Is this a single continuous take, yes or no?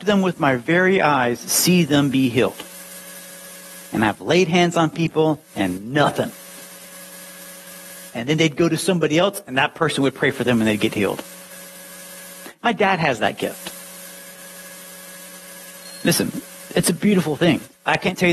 yes